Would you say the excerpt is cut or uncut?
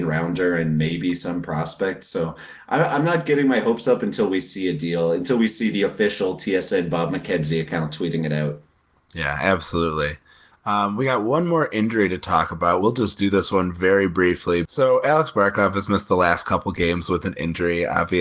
uncut